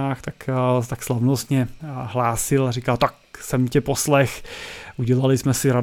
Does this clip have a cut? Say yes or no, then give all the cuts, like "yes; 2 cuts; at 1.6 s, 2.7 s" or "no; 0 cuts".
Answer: yes; 1 cut; at 1.8 s